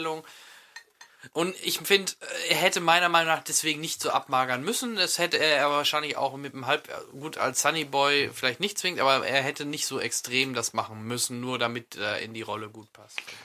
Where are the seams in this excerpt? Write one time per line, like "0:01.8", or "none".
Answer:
none